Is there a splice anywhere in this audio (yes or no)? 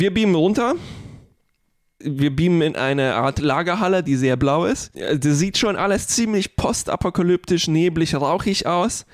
no